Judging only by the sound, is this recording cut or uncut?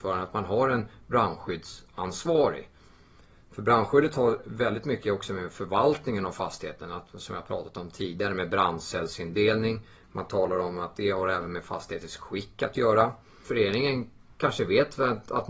cut